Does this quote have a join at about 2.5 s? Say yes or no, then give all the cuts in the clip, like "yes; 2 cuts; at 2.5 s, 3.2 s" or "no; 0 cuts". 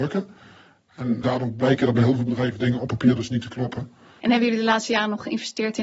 no; 2 cuts; at 1.2 s, 4.2 s